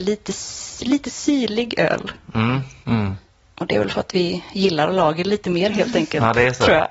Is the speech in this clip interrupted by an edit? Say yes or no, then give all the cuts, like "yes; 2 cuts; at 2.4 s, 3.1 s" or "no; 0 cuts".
yes; 1 cut; at 2.8 s